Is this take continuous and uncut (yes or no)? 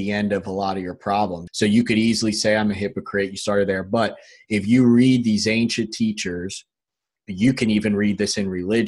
no